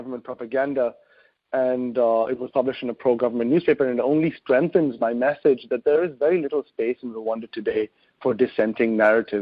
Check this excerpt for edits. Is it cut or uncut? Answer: uncut